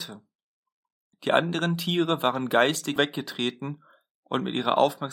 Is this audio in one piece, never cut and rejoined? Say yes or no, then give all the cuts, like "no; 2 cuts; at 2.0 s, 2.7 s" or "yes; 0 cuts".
no; 2 cuts; at 1.1 s, 3.0 s